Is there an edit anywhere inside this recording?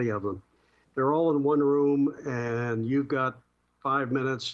no; 0 cuts

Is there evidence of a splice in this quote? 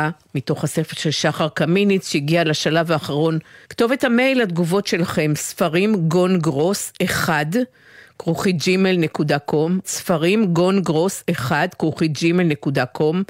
yes; 2 cuts; at 3.6 s, 9.8 s

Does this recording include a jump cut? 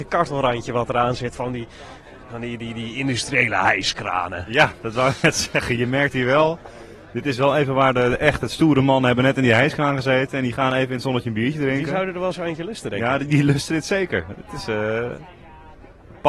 no; 0 cuts

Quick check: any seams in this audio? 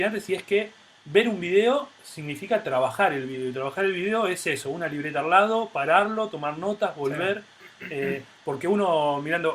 no; 0 cuts

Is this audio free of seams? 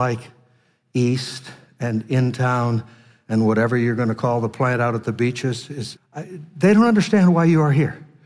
no; 1 cut; at 6.0 s

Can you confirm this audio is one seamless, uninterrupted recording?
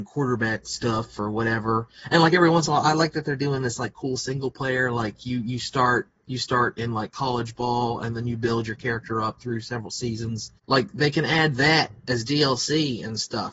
no; 1 cut; at 10.6 s

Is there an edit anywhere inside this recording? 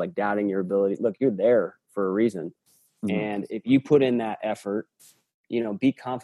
no; 0 cuts

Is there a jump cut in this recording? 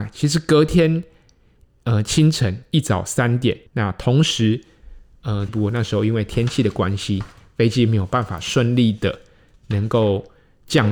yes; 2 cuts; at 3.7 s, 5.5 s

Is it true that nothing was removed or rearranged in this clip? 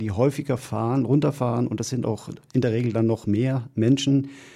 yes; 0 cuts

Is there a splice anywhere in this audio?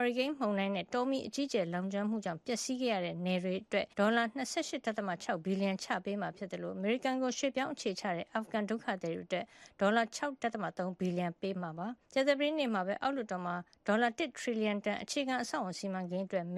yes; 2 cuts; at 3.9 s, 12.0 s

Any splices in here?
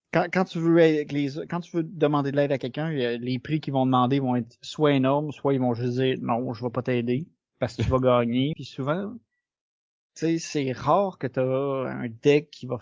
yes; 1 cut; at 8.5 s

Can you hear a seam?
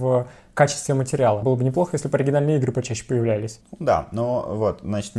yes; 1 cut; at 1.4 s

